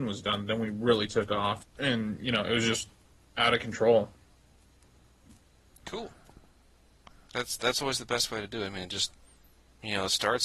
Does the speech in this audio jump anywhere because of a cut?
yes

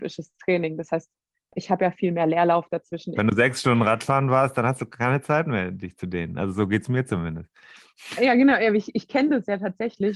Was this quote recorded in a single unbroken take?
no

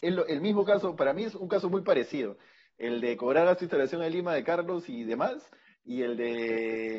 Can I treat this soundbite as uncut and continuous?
yes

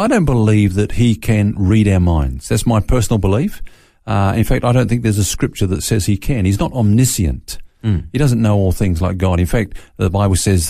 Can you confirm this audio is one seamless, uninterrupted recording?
yes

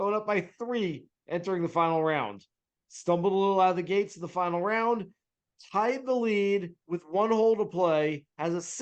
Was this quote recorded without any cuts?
yes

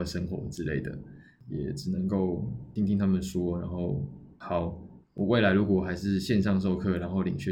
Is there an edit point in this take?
yes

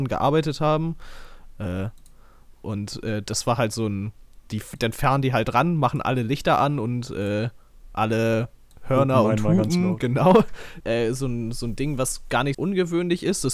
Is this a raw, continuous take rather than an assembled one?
no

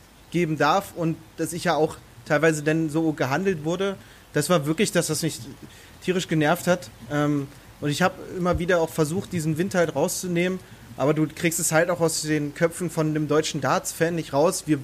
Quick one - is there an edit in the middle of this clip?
no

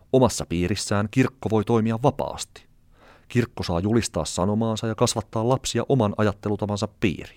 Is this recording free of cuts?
yes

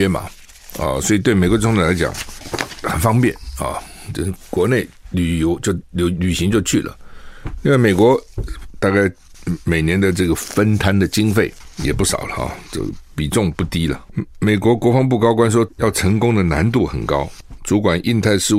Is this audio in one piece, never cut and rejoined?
no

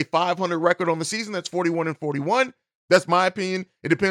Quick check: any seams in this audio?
yes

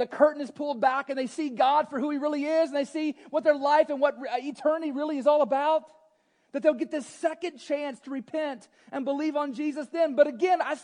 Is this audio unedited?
yes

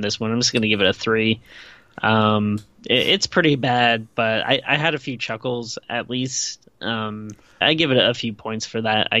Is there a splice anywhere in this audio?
yes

